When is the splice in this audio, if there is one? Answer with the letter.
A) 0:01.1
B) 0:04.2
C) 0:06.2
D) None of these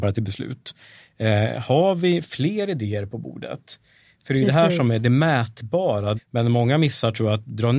C